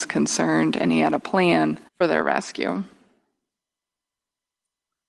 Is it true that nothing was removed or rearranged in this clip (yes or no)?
no